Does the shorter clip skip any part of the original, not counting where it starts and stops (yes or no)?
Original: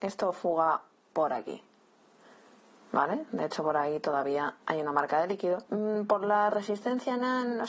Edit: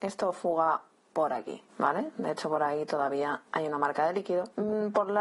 yes